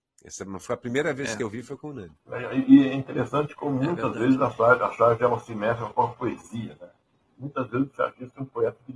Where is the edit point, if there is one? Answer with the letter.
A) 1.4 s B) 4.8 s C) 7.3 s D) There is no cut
D